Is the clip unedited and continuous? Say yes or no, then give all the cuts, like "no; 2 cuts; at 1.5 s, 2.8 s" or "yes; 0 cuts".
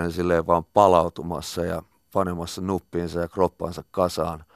yes; 0 cuts